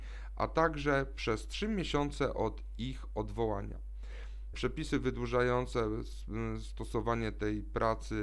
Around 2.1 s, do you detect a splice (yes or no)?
no